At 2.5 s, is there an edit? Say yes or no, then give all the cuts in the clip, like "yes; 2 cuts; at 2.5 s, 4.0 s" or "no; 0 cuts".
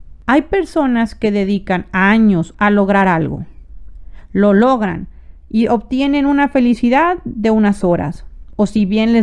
yes; 1 cut; at 2.5 s